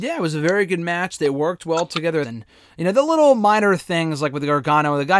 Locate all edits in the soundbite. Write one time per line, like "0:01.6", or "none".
0:02.2